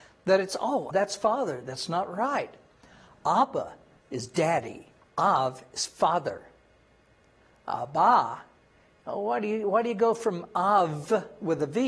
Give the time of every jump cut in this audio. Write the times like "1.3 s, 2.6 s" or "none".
0.9 s, 5.0 s